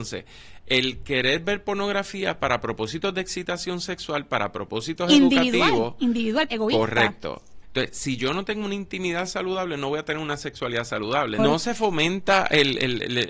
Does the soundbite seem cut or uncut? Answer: cut